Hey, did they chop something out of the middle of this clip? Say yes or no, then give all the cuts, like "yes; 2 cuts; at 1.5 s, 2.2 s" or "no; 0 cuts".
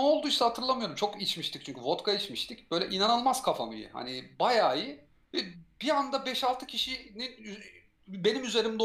no; 0 cuts